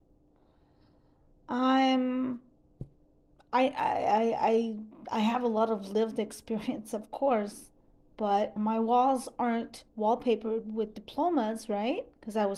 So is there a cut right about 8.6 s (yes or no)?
yes